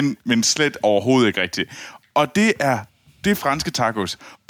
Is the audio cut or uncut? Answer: uncut